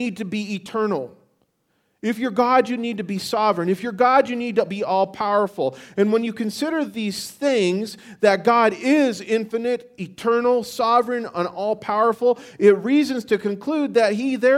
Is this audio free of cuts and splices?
yes; 0 cuts

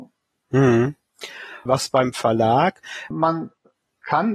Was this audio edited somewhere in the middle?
yes; 2 cuts; at 1.7 s, 3.1 s

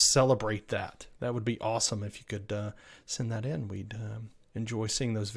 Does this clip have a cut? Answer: no; 0 cuts

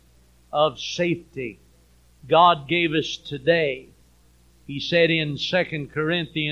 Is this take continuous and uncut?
yes; 0 cuts

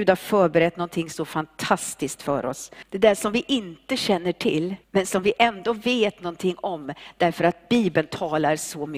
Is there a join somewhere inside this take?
yes; 2 cuts; at 2.8 s, 4.8 s

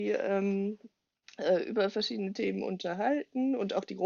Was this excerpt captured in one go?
yes; 0 cuts

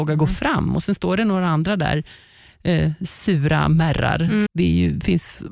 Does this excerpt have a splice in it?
yes; 1 cut; at 4.5 s

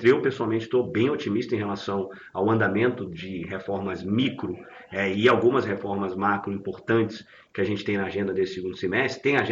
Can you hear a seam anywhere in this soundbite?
no; 0 cuts

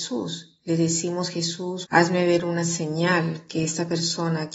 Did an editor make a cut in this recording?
yes; 1 cut; at 1.9 s

